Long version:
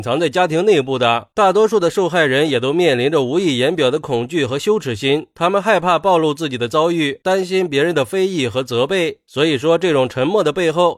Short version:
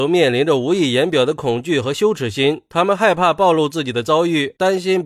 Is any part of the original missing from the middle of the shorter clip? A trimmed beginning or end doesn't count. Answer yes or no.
no